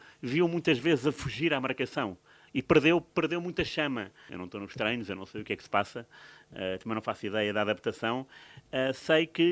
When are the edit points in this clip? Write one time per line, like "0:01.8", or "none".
0:02.5
0:04.3

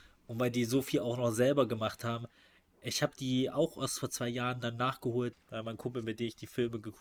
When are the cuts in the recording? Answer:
0:05.3

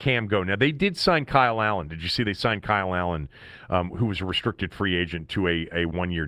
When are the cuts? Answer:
none

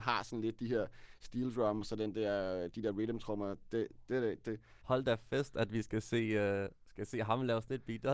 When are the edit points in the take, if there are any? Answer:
0:04.8

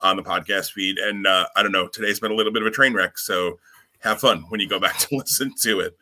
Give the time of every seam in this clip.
none

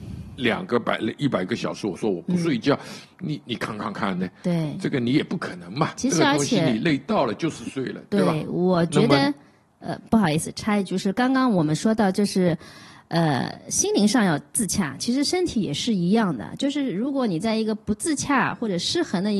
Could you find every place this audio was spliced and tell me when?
none

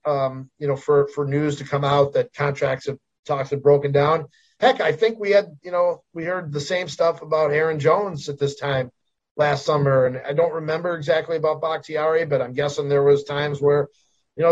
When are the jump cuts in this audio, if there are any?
none

